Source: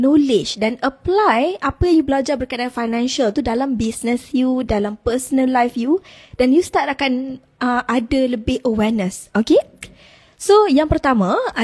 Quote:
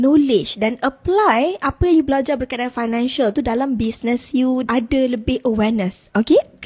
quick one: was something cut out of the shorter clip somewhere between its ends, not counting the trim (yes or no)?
yes